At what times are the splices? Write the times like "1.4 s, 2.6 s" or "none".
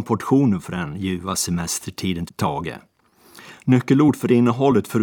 2.3 s